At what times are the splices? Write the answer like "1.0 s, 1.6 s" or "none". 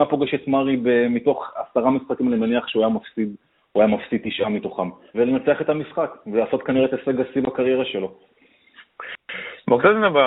5.1 s